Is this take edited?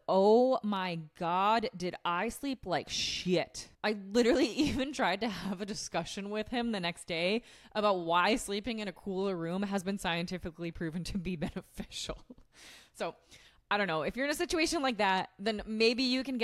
yes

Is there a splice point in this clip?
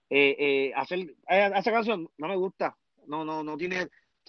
no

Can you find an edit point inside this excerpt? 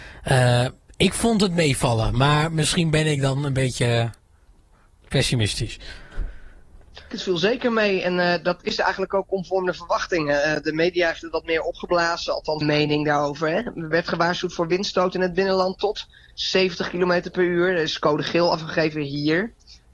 yes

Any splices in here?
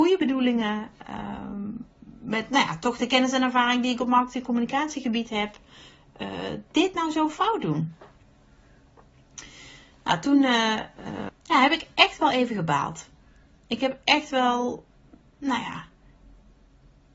yes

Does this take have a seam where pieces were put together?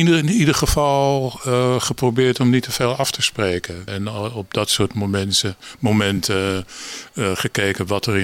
yes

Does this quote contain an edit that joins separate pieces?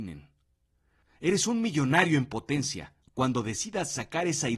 yes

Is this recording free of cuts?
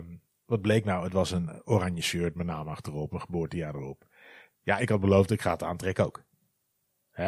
no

